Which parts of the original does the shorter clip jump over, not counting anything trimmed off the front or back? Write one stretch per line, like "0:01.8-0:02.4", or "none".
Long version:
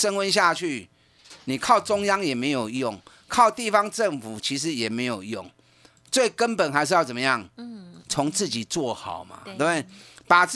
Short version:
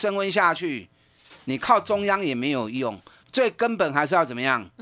0:03.2-0:06.0